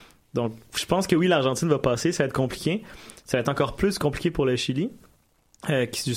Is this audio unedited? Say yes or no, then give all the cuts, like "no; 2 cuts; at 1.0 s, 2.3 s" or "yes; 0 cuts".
yes; 0 cuts